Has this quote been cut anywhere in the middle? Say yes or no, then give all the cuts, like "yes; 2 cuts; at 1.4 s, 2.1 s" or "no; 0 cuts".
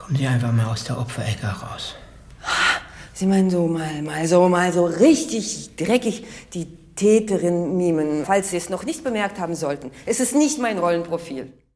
yes; 1 cut; at 8.2 s